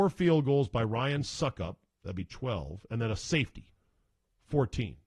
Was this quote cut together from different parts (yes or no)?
no